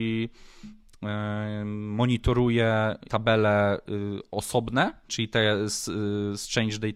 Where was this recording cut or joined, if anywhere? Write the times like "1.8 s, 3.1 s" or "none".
5.1 s